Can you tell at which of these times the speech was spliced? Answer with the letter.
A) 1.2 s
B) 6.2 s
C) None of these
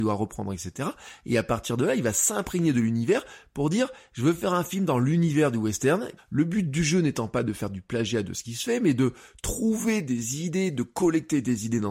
B